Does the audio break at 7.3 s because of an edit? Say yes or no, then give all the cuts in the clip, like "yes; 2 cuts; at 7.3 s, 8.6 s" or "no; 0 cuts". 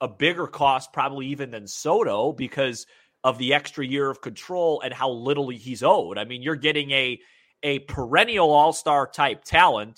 no; 0 cuts